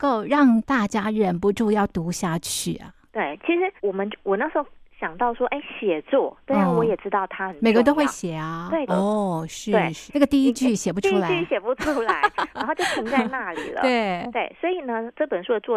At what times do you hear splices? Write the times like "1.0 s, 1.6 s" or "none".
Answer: 3.8 s, 8.9 s, 10.1 s